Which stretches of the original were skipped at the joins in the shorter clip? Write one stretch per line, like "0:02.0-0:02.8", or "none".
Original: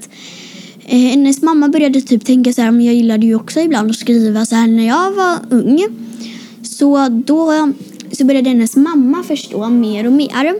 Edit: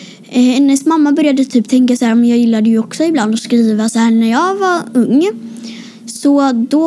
none